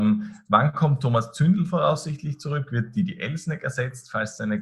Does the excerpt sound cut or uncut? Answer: uncut